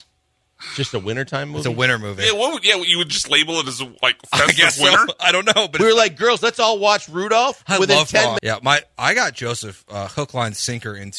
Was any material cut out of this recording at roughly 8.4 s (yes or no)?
yes